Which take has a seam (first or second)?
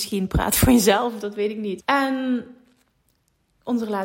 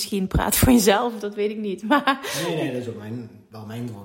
first